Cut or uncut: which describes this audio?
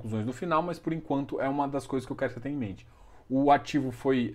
uncut